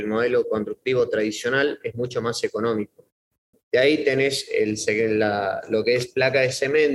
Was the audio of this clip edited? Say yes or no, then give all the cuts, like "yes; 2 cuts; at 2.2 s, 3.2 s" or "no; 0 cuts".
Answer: yes; 1 cut; at 3.5 s